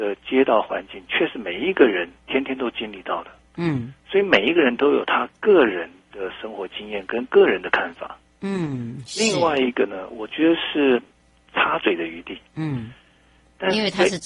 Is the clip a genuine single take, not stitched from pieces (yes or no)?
no